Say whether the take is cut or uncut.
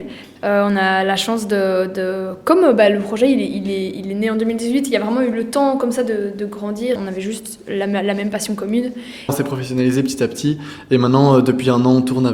cut